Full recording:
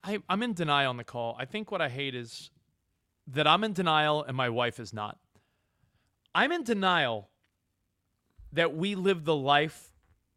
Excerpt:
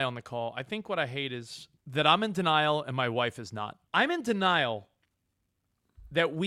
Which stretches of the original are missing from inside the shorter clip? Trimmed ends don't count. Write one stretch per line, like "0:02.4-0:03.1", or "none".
0:02.6-0:03.2
0:05.3-0:06.3